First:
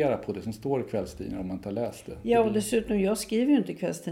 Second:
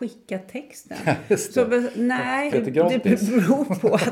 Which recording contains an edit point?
second; 1 cut; at 2.5 s

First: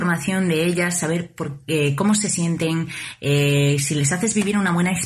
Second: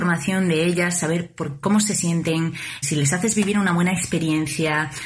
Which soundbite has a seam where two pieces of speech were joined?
second; 2 cuts; at 1.6 s, 2.8 s

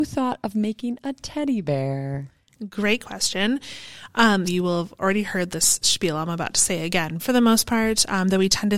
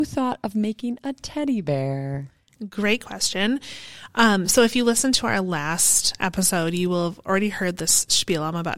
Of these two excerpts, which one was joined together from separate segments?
first; 2 cuts; at 4.5 s, 7.2 s

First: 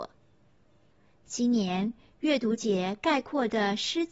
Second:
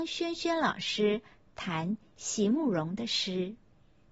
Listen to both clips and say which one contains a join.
first; 1 cut; at 1.1 s

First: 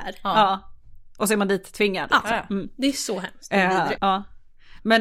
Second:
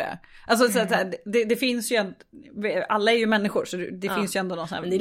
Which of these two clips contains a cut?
first; 1 cut; at 4.0 s

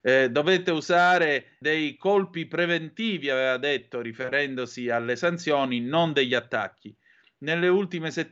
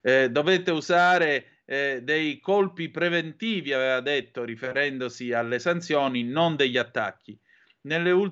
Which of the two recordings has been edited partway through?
first; 1 cut; at 1.6 s

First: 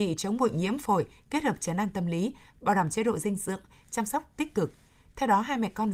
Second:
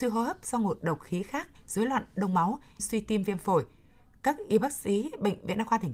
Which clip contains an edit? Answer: second; 2 cuts; at 1.5 s, 2.8 s

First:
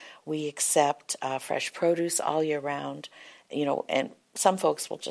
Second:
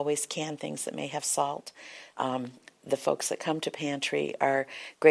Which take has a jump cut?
second; 1 cut; at 2.1 s

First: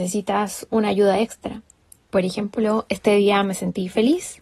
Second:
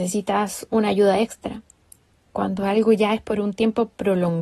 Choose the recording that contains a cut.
first; 1 cut; at 2.0 s

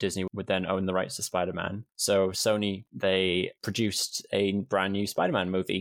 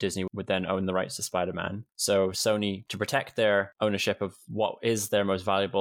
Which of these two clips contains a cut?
first; 1 cut; at 2.9 s

